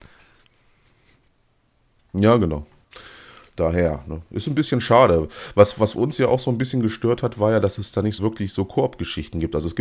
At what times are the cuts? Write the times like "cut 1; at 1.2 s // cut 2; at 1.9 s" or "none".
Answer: cut 1; at 8.2 s